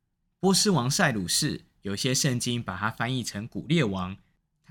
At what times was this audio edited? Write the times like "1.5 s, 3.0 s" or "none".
none